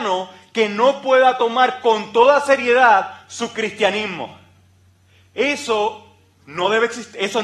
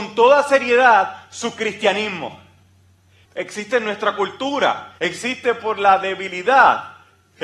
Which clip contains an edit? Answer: second; 2 cuts; at 3.3 s, 5.0 s

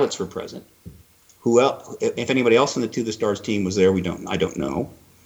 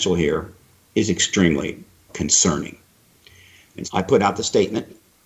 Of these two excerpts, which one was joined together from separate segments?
second; 2 cuts; at 2.1 s, 3.8 s

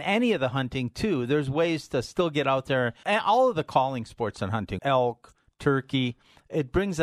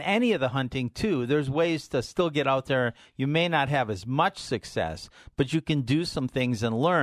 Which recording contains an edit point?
first; 2 cuts; at 3.0 s, 4.8 s

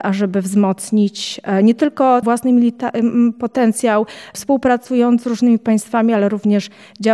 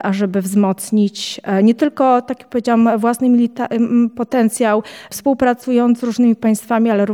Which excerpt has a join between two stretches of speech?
first; 1 cut; at 2.2 s

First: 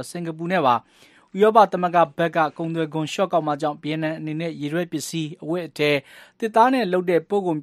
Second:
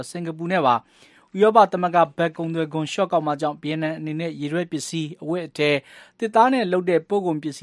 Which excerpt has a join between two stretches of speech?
second; 1 cut; at 2.3 s

